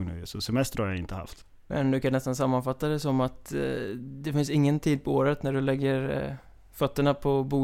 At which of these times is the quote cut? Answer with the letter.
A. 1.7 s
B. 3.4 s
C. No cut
A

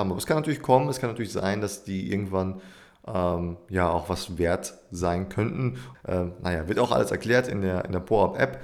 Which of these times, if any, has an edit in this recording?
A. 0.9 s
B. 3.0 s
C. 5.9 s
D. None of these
C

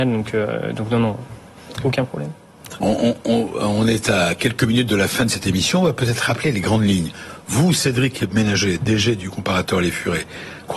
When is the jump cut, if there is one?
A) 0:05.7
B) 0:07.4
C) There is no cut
C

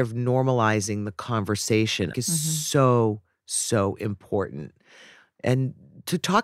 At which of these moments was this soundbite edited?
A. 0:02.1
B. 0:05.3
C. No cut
A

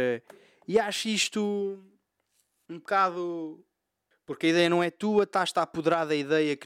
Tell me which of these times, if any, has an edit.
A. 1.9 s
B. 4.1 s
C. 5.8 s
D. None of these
B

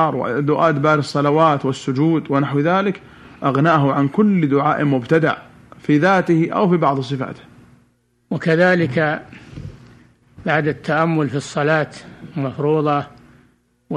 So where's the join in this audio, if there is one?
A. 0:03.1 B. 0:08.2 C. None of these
C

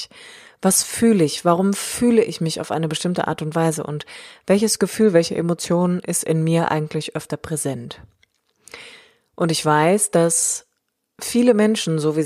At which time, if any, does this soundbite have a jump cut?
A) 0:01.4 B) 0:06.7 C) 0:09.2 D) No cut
D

